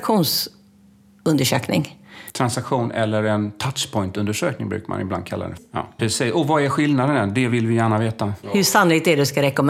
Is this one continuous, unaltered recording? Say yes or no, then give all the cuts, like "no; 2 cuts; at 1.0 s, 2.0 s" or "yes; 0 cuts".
no; 2 cuts; at 6.0 s, 8.4 s